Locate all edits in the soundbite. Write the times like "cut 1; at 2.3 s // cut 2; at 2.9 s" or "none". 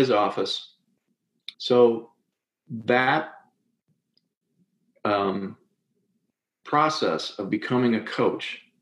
cut 1; at 1.5 s